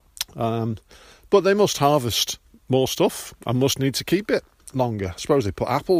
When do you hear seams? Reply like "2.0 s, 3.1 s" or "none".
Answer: none

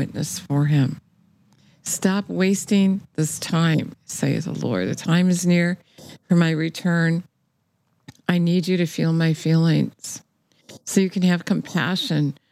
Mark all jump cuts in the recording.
none

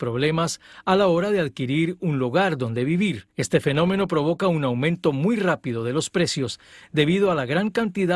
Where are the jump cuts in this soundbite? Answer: 3.3 s

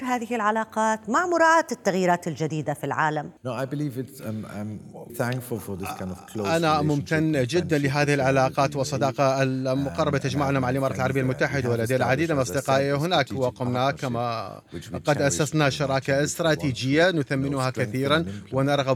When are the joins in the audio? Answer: 3.4 s, 5.1 s

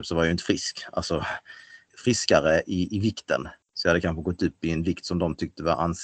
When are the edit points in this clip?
1.9 s, 3.6 s

